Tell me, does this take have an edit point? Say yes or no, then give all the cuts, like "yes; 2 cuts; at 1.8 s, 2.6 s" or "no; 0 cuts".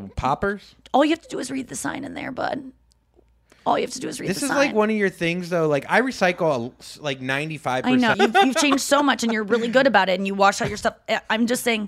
yes; 1 cut; at 8.1 s